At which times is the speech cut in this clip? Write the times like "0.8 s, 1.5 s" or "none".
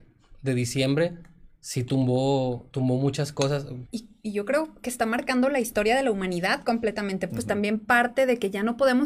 3.9 s, 7.3 s